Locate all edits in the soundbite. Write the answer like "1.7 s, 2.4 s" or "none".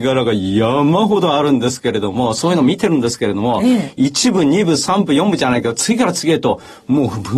none